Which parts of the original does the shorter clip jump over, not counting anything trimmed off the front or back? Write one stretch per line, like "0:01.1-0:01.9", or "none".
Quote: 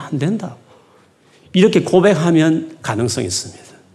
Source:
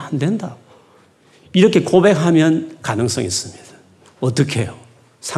none